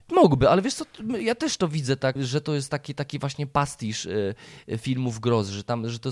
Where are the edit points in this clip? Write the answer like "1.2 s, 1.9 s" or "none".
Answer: 2.2 s